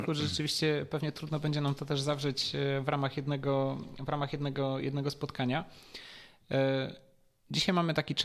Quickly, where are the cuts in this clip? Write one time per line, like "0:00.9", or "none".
none